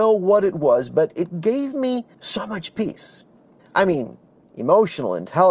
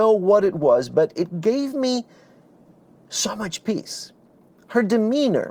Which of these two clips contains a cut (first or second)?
first